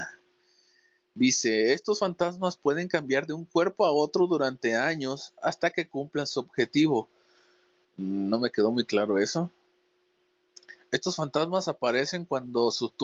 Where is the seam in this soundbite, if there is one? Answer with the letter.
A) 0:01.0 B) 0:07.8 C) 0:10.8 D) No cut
B